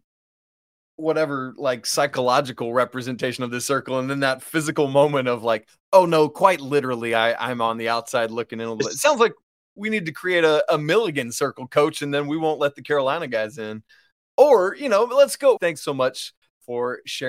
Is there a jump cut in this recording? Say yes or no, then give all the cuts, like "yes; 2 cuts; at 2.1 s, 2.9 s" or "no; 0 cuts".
yes; 2 cuts; at 14.2 s, 15.6 s